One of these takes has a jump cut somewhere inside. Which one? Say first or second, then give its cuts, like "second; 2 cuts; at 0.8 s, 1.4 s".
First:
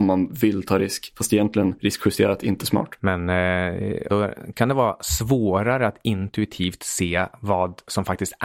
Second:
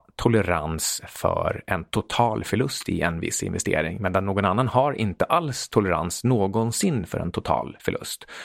first; 2 cuts; at 3.0 s, 4.1 s